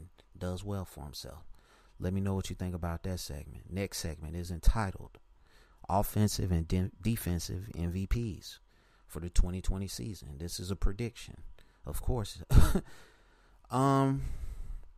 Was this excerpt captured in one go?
yes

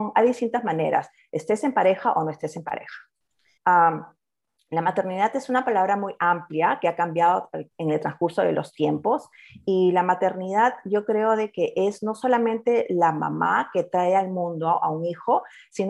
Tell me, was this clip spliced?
yes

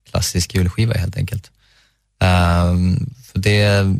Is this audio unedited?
yes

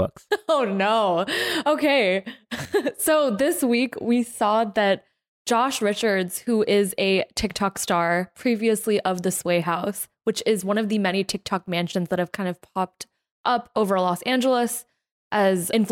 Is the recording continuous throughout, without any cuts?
yes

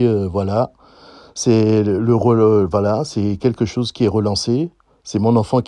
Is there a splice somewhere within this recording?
no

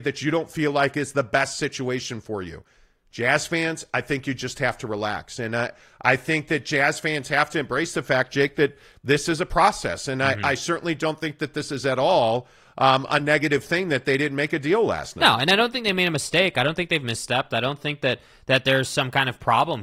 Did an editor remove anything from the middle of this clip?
no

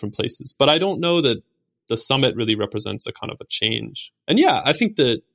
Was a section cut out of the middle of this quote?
no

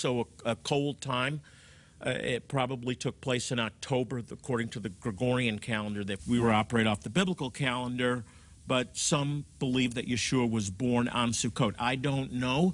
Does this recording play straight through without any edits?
no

